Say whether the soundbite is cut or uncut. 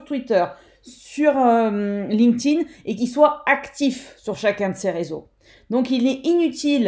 uncut